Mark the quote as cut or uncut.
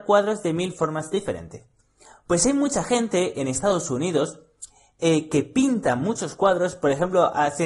uncut